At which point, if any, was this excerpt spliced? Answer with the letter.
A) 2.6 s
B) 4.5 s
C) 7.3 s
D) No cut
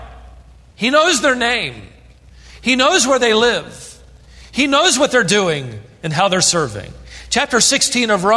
D